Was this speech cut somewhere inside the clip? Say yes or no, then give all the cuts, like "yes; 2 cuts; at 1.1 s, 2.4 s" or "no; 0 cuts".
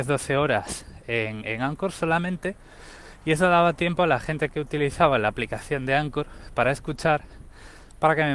no; 0 cuts